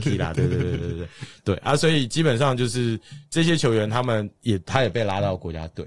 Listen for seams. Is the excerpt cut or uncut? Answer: uncut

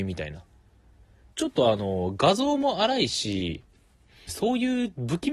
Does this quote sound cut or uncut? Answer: cut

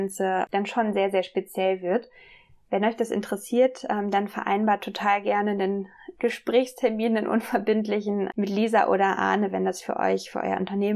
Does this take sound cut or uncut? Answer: uncut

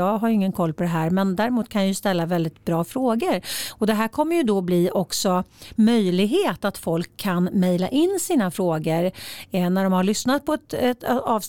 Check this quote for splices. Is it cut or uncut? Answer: uncut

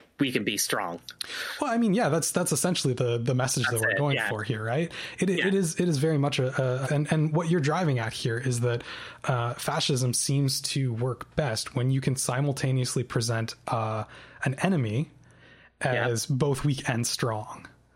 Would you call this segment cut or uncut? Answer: cut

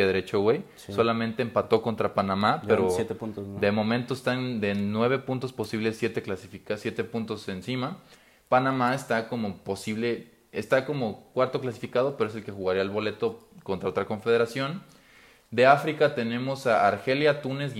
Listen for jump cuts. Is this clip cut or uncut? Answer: uncut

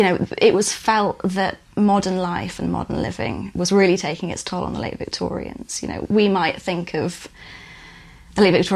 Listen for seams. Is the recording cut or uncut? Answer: uncut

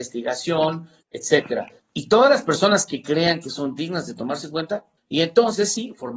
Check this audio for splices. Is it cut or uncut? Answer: cut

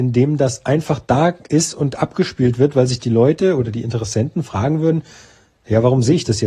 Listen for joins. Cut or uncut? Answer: uncut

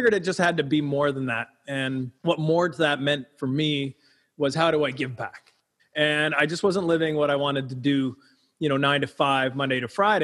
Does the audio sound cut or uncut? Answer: cut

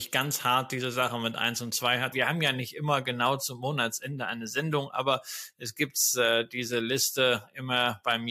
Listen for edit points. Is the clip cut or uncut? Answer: cut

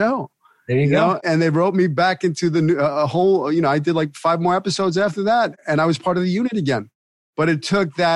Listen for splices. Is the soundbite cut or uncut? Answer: uncut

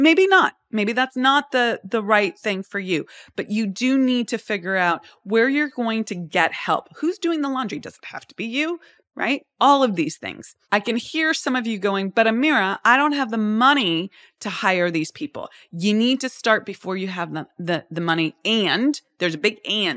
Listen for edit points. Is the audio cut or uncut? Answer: cut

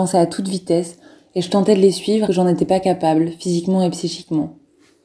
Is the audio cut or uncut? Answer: cut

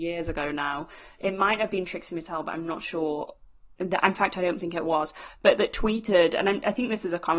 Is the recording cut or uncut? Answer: uncut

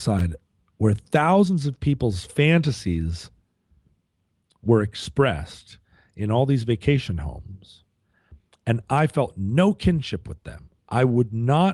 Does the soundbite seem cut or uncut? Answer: uncut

